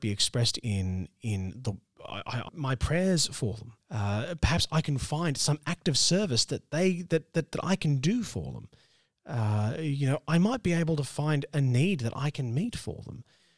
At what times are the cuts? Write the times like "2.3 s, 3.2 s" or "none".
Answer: 2.5 s, 3.8 s

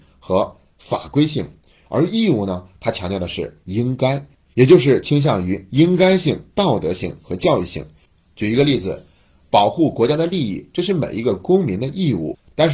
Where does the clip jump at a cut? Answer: none

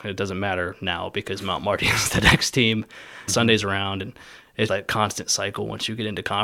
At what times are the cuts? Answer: 3.3 s, 4.7 s

